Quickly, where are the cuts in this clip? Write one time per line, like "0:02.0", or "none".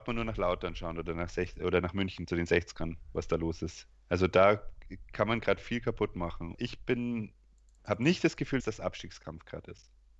0:03.9
0:06.5
0:08.6